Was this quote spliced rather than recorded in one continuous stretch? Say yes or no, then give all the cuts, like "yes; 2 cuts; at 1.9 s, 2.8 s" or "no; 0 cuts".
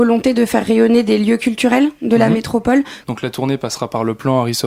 yes; 1 cut; at 3.0 s